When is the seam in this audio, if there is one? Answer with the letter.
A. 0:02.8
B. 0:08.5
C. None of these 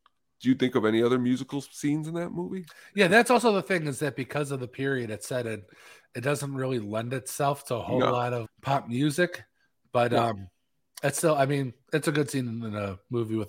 B